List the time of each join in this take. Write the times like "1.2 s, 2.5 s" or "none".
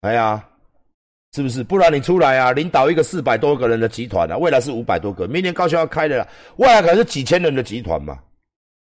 none